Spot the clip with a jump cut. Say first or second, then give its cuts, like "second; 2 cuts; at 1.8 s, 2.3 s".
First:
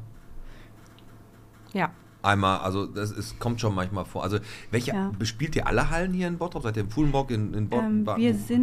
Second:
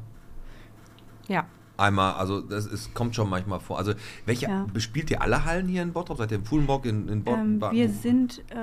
second; 1 cut; at 1.2 s